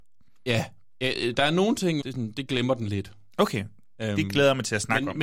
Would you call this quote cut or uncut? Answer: cut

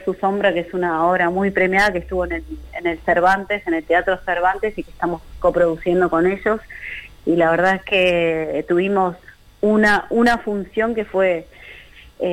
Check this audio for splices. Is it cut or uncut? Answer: uncut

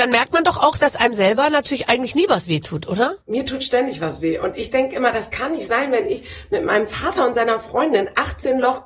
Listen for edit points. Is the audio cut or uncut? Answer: cut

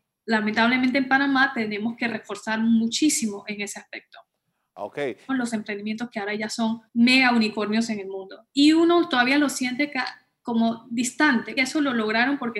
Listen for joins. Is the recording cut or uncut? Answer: cut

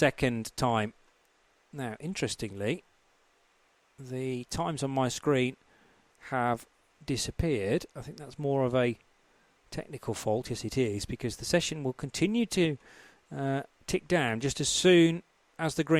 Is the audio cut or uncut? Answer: uncut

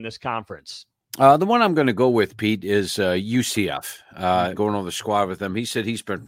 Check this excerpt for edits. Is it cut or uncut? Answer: cut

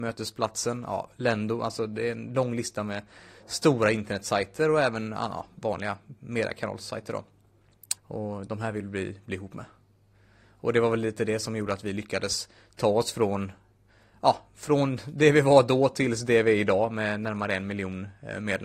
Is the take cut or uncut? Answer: cut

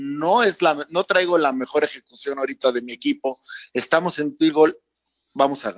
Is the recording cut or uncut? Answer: uncut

